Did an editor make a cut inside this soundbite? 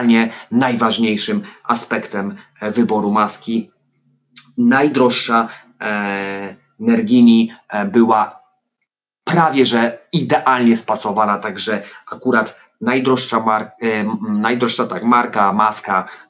no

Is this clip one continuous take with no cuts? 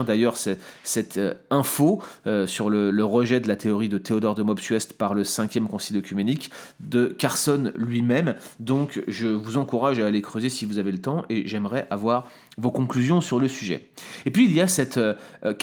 yes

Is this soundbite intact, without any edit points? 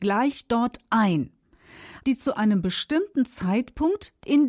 no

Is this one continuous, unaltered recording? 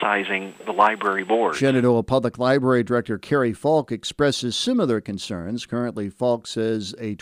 yes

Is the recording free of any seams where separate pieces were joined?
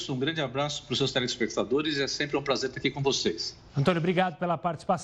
no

